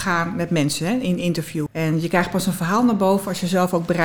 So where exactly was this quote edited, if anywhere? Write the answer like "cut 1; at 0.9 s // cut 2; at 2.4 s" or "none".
cut 1; at 1.7 s